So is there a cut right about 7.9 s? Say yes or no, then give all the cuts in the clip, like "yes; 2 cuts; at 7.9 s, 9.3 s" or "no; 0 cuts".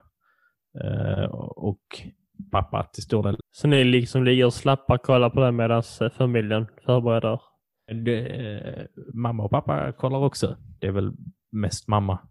yes; 3 cuts; at 3.4 s, 7.9 s, 10.8 s